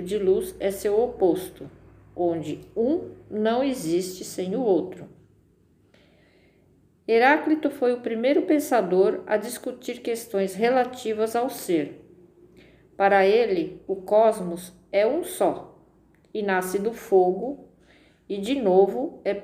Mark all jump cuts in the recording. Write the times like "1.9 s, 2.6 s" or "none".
none